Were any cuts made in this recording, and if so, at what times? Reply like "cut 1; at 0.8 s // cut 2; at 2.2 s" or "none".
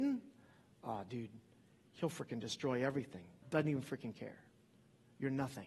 cut 1; at 3.4 s